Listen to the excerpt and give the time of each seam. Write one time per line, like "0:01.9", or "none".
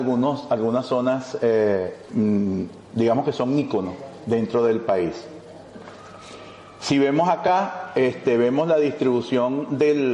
0:02.8